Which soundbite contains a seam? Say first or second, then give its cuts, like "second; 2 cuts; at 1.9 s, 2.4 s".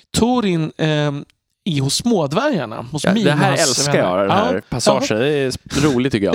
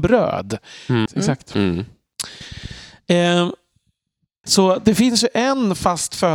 second; 2 cuts; at 1.1 s, 4.4 s